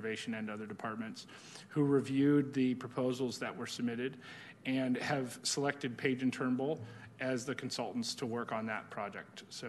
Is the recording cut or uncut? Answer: uncut